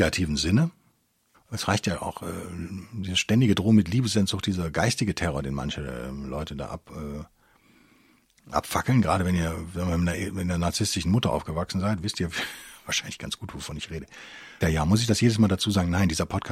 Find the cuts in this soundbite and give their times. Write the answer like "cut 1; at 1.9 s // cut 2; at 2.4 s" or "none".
cut 1; at 1.3 s // cut 2; at 14.6 s